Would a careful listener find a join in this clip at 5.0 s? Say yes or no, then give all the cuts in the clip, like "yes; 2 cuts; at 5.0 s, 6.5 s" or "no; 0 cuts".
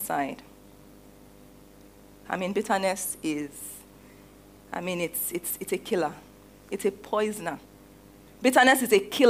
no; 2 cuts; at 2.2 s, 8.3 s